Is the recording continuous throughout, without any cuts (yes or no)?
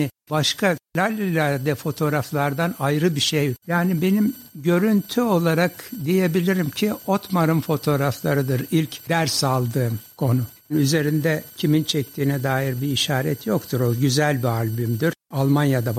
no